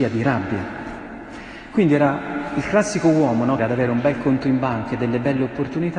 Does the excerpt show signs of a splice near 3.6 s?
yes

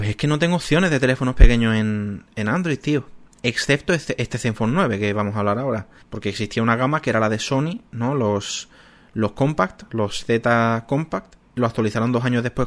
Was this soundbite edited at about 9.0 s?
no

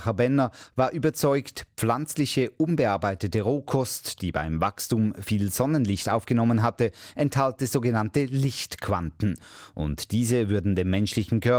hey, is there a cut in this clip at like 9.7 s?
no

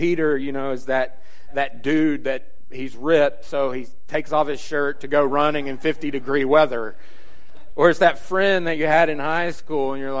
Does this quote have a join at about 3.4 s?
no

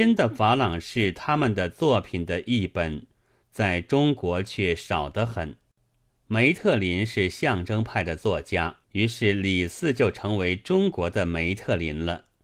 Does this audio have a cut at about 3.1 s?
no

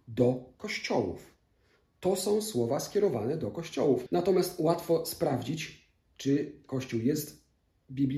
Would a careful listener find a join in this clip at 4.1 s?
yes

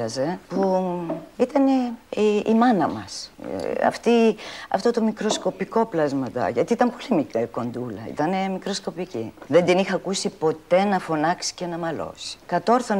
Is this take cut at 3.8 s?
no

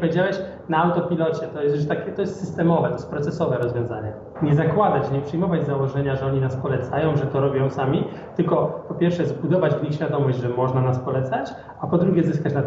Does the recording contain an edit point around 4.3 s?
yes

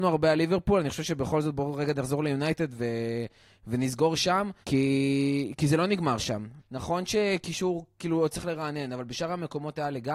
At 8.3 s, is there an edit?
no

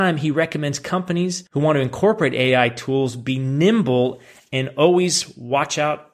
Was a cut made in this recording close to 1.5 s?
yes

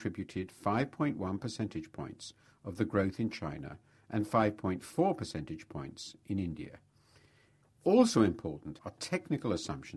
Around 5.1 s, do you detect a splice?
no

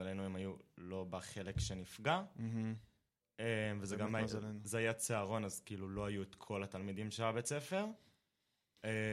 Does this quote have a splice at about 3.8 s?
no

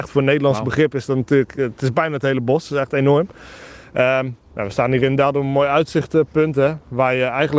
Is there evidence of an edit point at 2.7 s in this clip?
no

